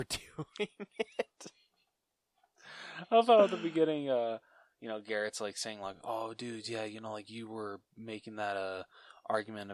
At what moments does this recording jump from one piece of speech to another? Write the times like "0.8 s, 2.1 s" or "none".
none